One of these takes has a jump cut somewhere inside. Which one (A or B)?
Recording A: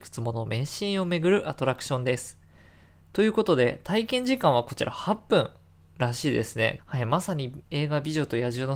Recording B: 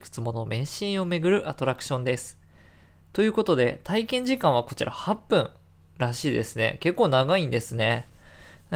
A